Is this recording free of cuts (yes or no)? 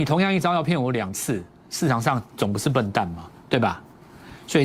no